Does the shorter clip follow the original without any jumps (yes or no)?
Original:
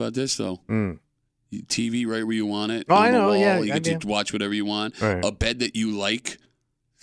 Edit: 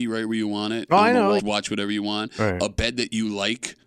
no